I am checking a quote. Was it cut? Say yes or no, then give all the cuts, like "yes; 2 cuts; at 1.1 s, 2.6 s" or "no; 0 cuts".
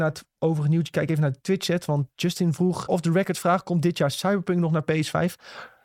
yes; 1 cut; at 2.9 s